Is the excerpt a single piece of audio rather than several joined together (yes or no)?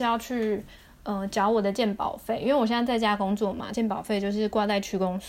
yes